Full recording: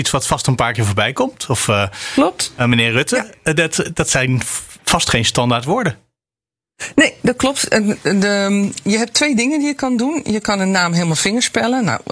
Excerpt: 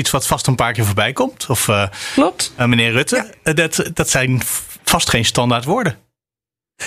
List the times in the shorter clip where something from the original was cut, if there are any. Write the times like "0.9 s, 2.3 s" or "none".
none